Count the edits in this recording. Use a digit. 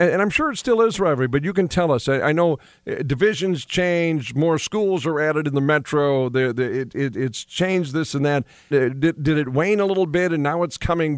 1